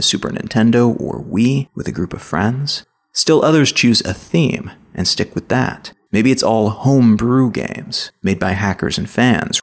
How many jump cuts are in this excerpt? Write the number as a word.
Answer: one